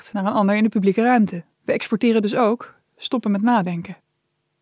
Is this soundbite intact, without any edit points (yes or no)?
no